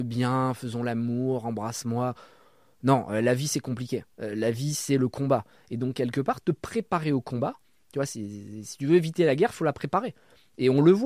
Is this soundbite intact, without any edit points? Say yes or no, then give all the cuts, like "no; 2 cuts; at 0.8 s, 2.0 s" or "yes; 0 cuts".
no; 2 cuts; at 4.1 s, 5.5 s